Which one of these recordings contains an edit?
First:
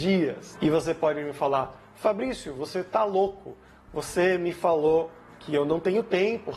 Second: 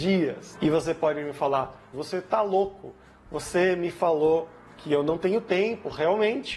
second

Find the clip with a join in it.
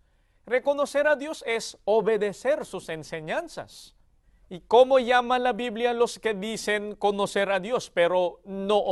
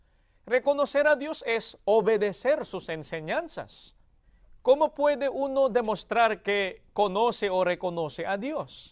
second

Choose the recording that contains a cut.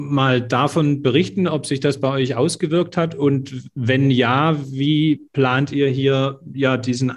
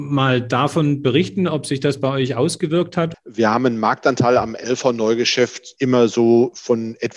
second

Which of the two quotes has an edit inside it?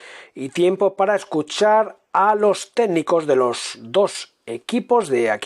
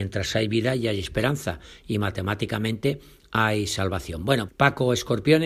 second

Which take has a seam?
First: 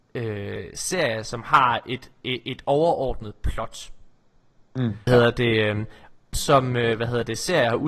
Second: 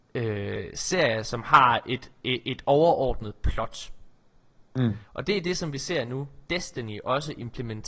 first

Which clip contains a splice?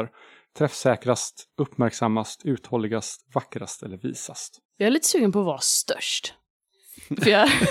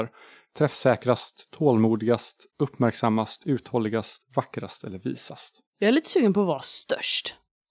first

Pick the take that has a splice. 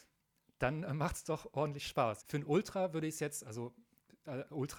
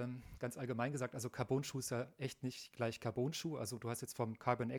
first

